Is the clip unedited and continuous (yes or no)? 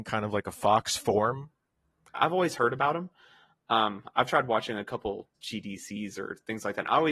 no